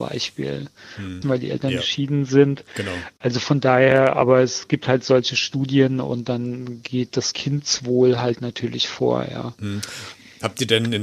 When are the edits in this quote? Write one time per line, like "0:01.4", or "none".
0:01.2